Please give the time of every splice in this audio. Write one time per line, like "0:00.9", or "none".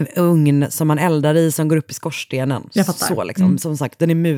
none